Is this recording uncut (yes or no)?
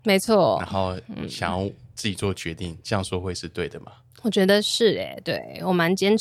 yes